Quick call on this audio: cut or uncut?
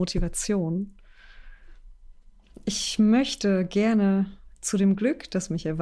uncut